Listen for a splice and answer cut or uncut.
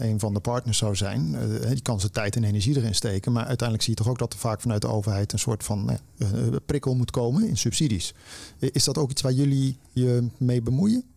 uncut